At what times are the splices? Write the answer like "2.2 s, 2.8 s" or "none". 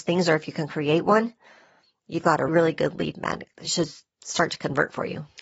2.5 s